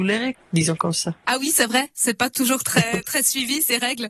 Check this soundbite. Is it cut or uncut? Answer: uncut